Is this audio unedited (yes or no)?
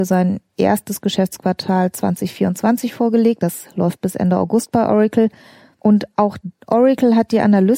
yes